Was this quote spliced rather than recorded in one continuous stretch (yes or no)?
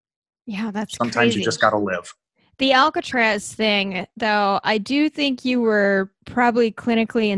no